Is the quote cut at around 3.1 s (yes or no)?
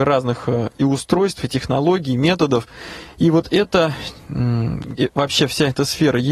yes